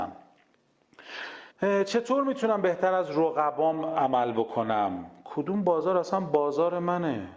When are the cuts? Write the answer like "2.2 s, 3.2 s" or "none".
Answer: 1.5 s